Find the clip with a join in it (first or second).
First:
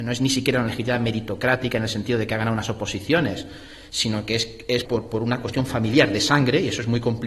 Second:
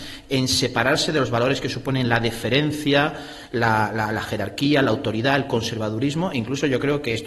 first